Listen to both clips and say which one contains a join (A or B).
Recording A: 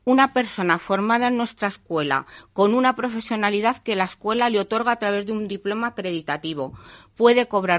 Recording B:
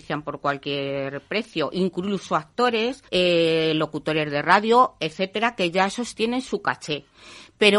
B